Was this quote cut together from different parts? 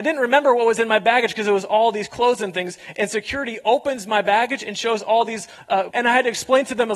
yes; 1 cut; at 5.9 s

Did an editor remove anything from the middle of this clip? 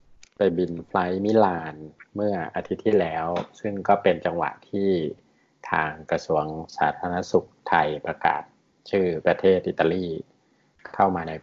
no; 0 cuts

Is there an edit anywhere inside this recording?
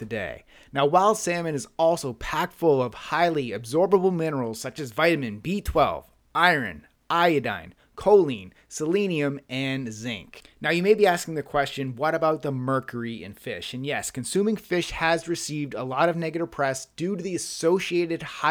no; 0 cuts

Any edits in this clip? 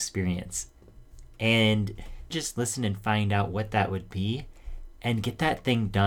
yes; 1 cut; at 2.3 s

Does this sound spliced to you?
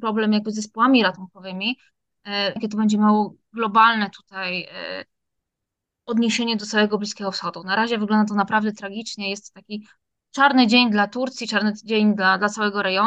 yes; 1 cut; at 2.6 s

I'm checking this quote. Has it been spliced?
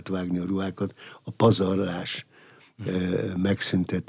no; 0 cuts

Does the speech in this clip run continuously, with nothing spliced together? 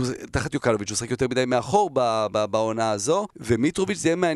no; 1 cut; at 3.3 s

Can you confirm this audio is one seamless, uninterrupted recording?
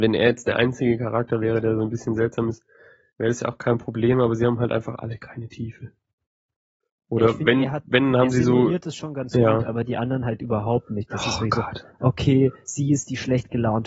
yes; 0 cuts

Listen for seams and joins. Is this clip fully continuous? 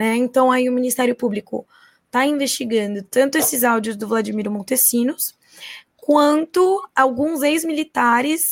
yes; 0 cuts

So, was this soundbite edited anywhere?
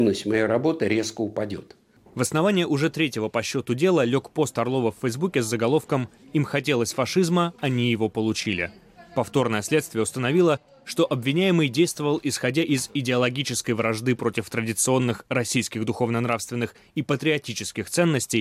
no; 0 cuts

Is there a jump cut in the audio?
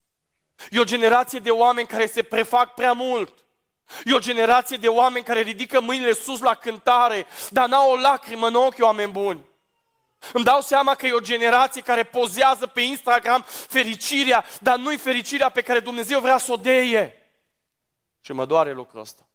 no; 0 cuts

